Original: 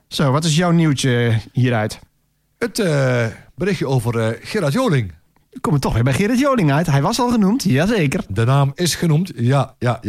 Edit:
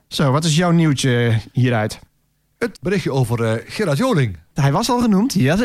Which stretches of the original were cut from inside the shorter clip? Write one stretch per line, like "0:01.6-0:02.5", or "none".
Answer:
0:02.7-0:03.5
0:05.3-0:06.9